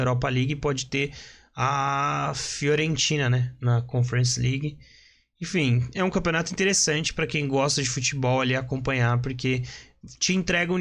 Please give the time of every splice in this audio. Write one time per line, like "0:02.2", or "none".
none